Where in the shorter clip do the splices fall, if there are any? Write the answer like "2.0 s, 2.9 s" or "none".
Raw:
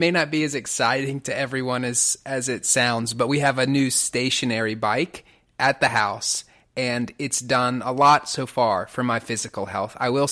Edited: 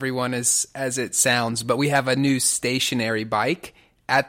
none